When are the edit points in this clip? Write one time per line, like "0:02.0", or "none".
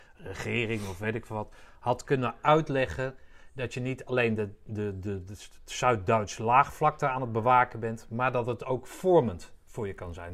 none